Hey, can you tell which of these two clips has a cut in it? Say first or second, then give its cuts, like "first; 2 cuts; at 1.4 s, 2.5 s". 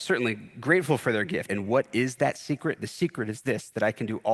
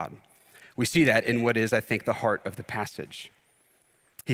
first; 1 cut; at 1.5 s